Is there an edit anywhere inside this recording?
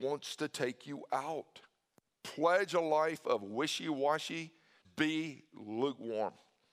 yes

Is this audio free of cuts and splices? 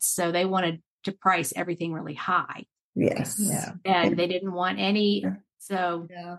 no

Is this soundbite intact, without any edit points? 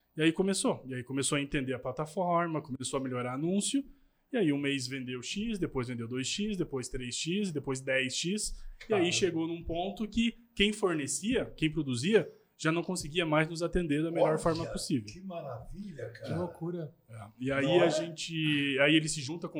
yes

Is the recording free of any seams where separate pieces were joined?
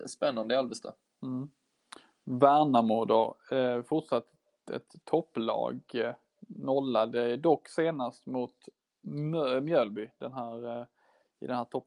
yes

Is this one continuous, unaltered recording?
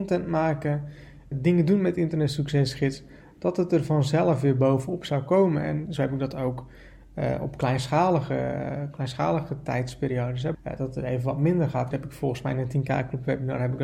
no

